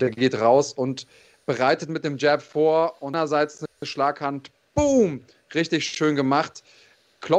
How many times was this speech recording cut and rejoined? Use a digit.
0